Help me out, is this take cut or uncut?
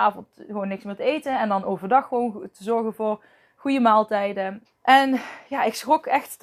cut